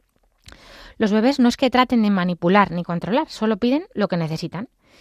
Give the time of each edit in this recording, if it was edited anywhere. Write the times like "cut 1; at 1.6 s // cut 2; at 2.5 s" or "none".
none